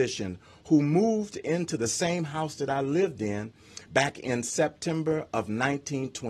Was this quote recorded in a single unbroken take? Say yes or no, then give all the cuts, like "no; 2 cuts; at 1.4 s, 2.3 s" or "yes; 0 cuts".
yes; 0 cuts